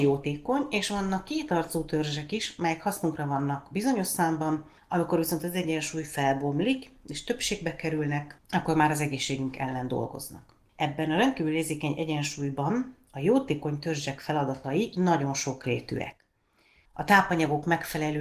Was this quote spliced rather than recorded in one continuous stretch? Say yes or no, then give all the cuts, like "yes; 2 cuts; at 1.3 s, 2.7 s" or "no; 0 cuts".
no; 0 cuts